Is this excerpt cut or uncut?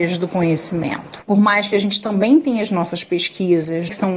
cut